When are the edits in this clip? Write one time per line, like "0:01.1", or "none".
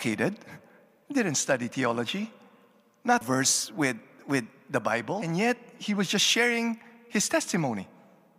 0:03.2